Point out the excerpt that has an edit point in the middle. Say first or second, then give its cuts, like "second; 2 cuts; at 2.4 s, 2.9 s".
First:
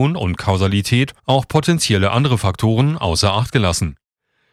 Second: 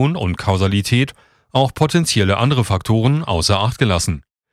first; 1 cut; at 1.2 s